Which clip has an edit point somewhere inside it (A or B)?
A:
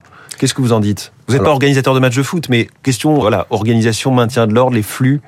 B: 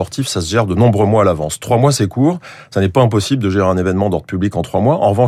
A